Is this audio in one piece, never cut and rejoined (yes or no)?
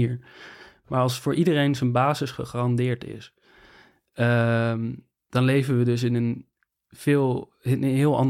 yes